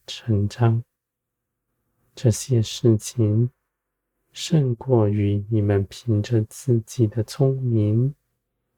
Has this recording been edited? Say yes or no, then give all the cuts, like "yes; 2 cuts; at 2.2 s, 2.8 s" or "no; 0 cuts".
no; 0 cuts